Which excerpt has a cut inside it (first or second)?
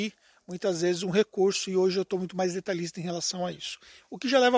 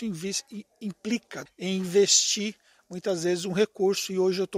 second